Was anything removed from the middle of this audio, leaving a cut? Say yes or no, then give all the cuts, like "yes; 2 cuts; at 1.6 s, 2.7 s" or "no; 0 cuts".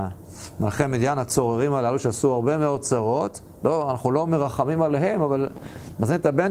no; 0 cuts